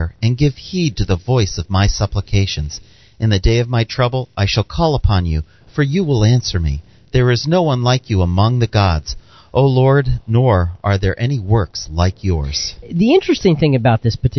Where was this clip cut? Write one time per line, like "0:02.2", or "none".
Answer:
none